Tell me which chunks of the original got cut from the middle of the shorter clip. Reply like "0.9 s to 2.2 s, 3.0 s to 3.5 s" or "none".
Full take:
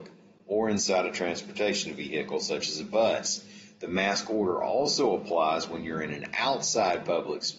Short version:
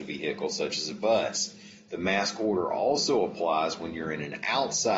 none